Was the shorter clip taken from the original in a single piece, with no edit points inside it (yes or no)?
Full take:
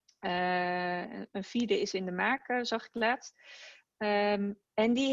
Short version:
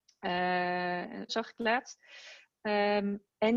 no